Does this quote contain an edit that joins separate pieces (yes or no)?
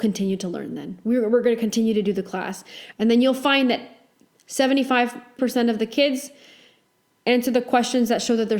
yes